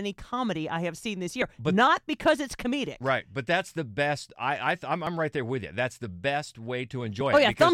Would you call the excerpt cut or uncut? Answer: uncut